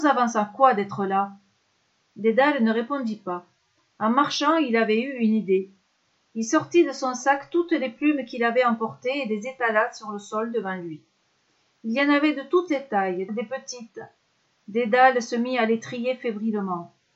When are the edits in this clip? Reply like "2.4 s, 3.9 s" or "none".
13.3 s